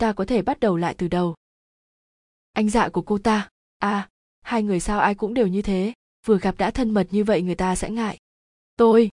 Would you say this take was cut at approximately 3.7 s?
yes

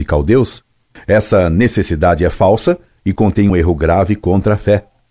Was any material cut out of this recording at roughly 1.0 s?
yes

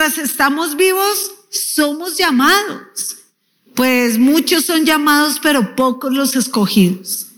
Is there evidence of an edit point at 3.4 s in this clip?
no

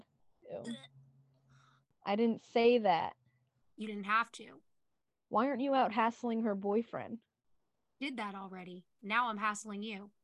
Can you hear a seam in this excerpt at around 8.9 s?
no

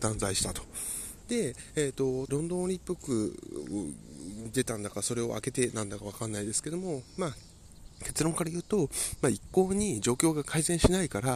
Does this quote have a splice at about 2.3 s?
yes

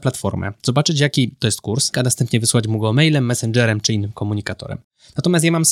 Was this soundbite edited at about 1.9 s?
yes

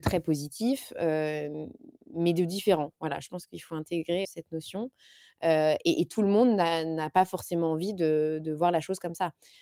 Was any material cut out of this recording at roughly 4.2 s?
yes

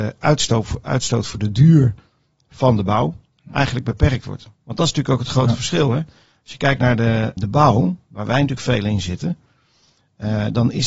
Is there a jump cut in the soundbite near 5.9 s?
no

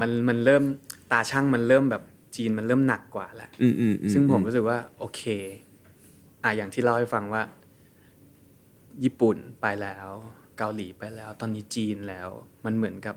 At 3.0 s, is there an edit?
no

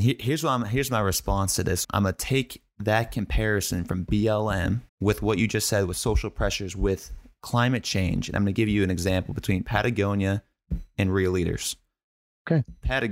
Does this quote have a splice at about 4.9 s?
yes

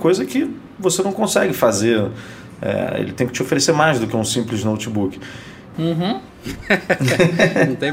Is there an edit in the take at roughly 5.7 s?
yes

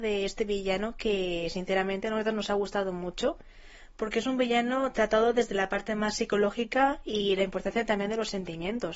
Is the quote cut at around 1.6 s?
no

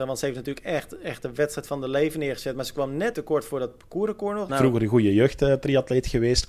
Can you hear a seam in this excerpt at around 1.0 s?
no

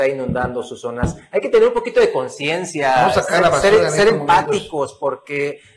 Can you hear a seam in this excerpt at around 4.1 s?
no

